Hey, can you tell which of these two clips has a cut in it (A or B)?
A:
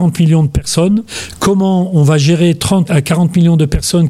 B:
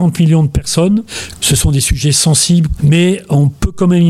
B